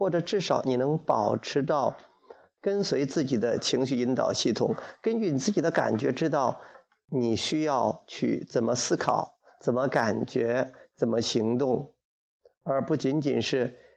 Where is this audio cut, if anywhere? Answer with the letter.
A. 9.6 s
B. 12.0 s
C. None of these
C